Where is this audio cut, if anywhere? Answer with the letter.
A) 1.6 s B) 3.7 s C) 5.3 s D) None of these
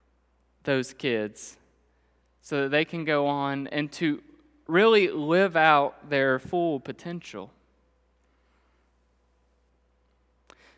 B